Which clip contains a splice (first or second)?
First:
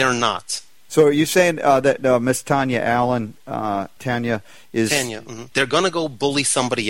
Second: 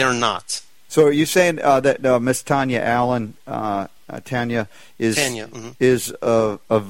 first